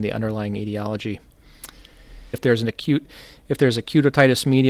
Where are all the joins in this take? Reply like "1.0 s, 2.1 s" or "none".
2.3 s